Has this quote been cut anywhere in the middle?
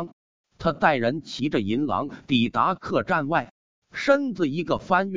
no; 0 cuts

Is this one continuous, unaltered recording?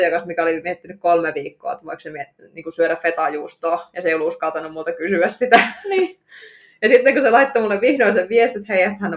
yes; 0 cuts

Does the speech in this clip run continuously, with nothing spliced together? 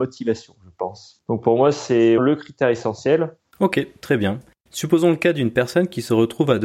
no; 2 cuts; at 2.2 s, 3.5 s

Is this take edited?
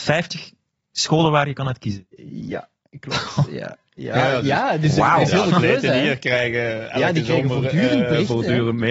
no; 0 cuts

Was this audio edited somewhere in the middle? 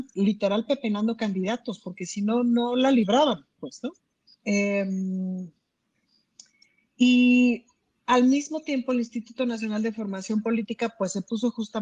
yes; 1 cut; at 4.3 s

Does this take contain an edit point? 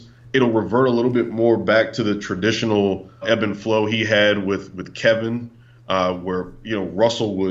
yes; 1 cut; at 3.2 s

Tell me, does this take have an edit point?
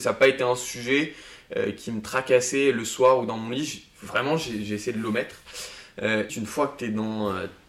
yes; 1 cut; at 6.3 s

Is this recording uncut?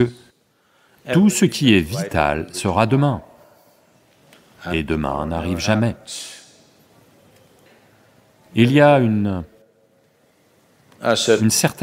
yes; 0 cuts

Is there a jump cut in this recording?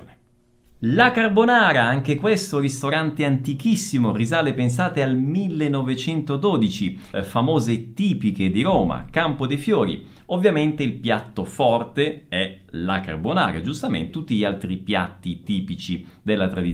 yes; 2 cuts; at 7.1 s, 14.1 s

